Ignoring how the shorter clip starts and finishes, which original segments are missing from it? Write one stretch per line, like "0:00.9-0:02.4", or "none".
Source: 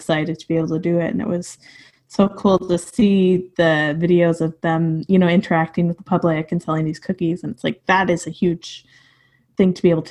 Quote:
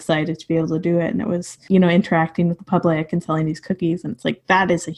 0:01.7-0:05.1